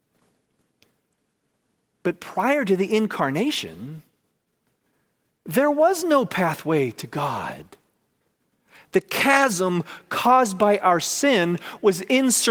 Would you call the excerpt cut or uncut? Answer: uncut